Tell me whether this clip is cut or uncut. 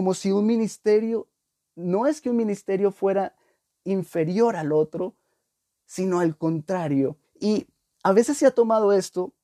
cut